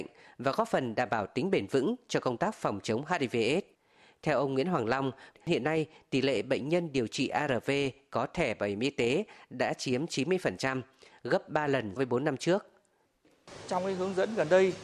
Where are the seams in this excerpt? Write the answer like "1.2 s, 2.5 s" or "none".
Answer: 5.3 s, 12.0 s